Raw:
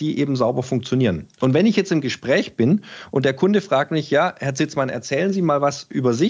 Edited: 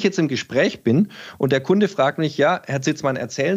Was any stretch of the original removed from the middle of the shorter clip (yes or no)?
no